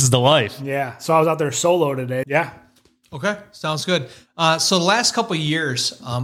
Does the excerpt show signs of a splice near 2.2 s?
yes; 1 cut; at 2.2 s

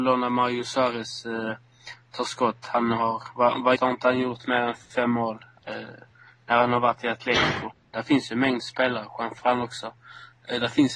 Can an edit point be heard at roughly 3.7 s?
yes; 2 cuts; at 3.7 s, 7.9 s

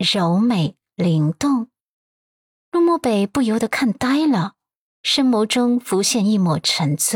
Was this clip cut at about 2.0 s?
no; 0 cuts

